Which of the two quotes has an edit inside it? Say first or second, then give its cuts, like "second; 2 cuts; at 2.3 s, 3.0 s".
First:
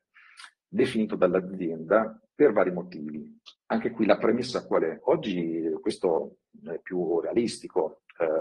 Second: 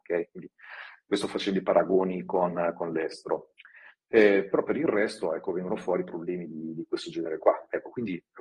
first; 2 cuts; at 3.6 s, 5.0 s